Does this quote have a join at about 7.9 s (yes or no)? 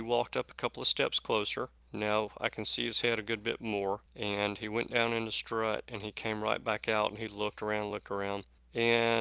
yes